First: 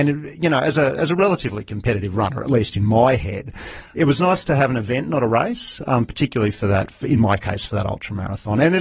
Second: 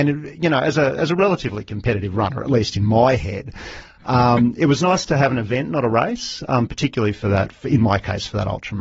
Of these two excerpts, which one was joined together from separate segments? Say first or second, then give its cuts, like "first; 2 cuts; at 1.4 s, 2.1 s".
first; 1 cut; at 3.9 s